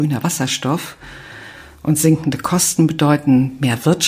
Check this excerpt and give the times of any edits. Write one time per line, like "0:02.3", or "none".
none